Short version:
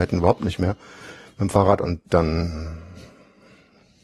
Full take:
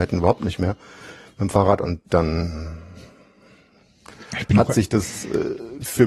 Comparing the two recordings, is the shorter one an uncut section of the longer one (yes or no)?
yes